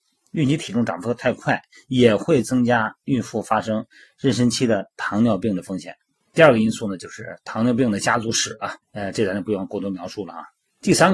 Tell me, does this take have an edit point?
yes; 2 cuts; at 6.2 s, 8.8 s

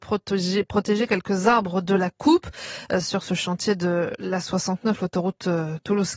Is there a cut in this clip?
no; 0 cuts

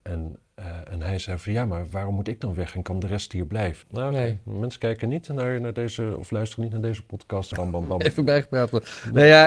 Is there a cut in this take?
yes; 2 cuts; at 3.8 s, 7.5 s

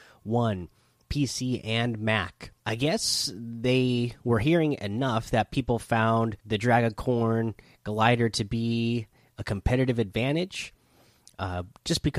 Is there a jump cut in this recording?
yes; 2 cuts; at 2.6 s, 6.4 s

